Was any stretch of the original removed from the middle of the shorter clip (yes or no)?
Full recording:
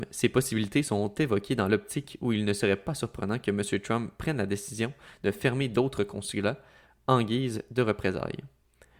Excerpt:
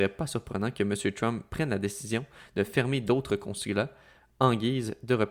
no